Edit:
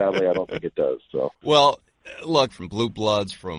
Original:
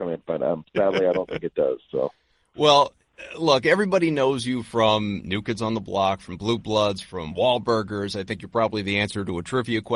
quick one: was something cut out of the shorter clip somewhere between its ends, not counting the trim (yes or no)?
yes